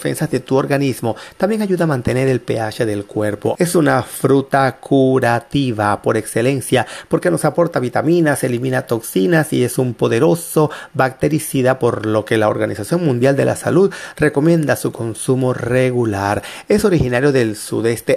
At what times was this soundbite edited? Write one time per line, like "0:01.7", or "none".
0:01.4
0:03.5